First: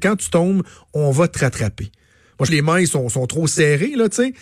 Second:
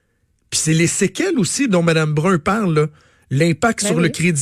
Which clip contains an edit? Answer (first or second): first